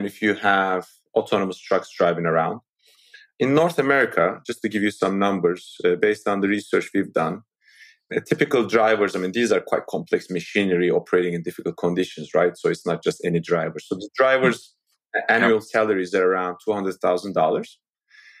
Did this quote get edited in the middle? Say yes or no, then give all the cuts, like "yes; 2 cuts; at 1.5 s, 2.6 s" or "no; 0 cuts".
no; 0 cuts